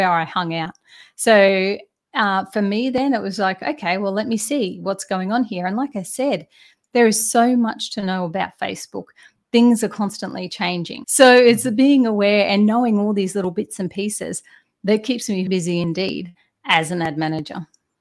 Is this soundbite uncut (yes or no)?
no